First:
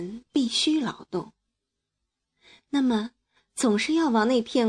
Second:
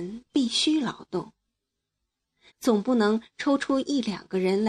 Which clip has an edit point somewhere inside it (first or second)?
second